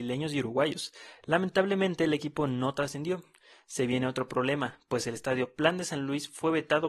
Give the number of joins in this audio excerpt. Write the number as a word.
zero